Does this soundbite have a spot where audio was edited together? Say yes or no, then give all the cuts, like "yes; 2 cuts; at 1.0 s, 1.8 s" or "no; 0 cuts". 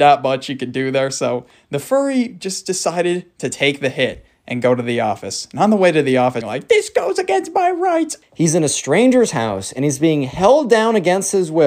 yes; 2 cuts; at 6.4 s, 8.2 s